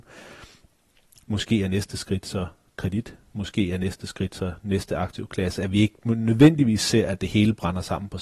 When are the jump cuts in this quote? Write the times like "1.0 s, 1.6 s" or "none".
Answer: 1.2 s